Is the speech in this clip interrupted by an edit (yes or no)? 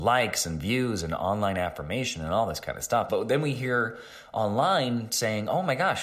yes